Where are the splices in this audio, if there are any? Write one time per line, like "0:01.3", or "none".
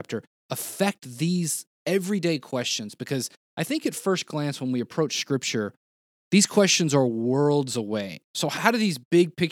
none